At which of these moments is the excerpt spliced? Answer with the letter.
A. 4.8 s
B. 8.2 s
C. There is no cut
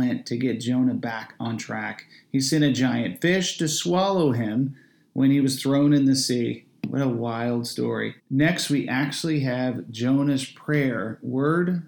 B